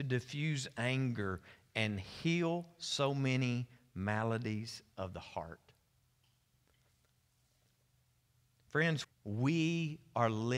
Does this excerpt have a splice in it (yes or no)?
yes